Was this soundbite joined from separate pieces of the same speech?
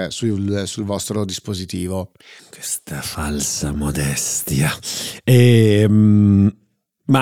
yes; 1 cut; at 2.4 s

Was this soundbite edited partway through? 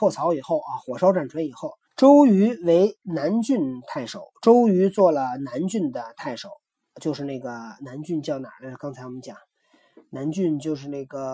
yes; 1 cut; at 1.8 s

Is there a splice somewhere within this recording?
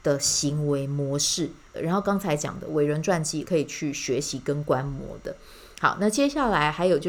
yes; 2 cuts; at 1.7 s, 3.4 s

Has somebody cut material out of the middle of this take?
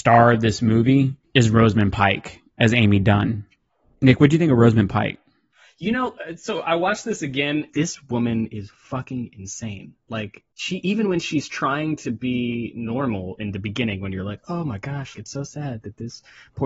yes; 3 cuts; at 7.7 s, 10.5 s, 15.1 s

